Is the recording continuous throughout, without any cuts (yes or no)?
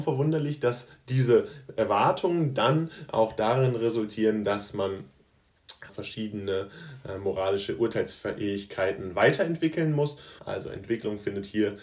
no